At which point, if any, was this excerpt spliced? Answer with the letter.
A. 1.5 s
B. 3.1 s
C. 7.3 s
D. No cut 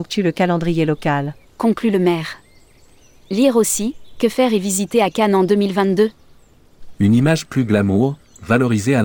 A